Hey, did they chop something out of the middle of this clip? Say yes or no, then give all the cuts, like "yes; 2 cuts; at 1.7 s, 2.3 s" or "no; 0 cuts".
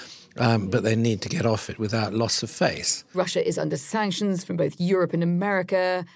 yes; 1 cut; at 3.1 s